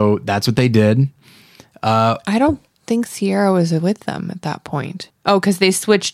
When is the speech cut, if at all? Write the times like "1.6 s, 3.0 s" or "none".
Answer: 5.1 s